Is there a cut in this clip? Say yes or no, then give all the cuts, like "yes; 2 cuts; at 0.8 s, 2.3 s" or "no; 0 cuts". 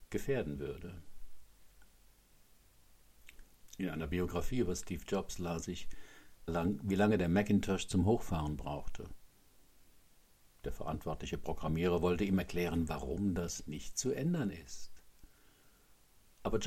yes; 2 cuts; at 3.7 s, 6.5 s